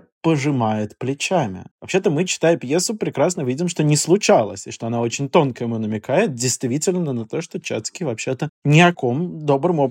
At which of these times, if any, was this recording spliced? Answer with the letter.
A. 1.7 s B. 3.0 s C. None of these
A